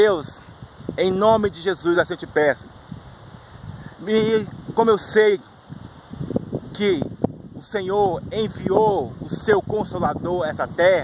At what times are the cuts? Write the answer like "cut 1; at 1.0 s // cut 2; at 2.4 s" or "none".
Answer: none